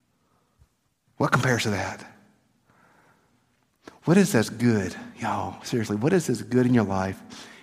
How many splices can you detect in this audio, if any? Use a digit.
0